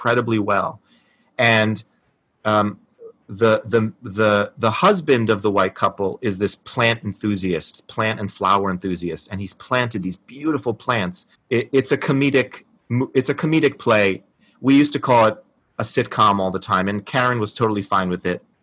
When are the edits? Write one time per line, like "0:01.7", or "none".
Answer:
0:11.3